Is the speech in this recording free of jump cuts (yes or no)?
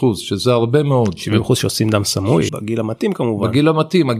no